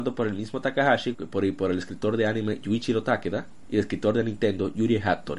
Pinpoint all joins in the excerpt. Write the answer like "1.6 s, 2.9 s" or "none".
1.1 s